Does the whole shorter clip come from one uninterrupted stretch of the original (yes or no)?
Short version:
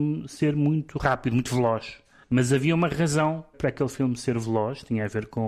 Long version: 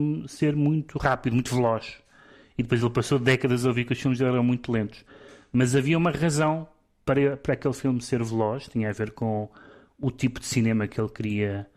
no